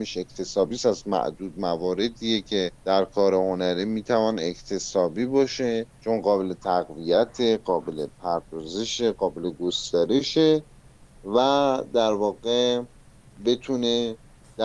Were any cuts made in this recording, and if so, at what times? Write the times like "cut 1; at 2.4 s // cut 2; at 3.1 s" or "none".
cut 1; at 2.7 s // cut 2; at 5.9 s